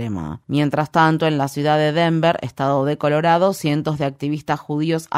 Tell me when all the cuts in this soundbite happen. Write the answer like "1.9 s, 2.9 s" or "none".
none